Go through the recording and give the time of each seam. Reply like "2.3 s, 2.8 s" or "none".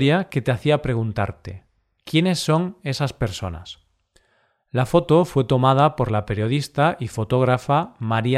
none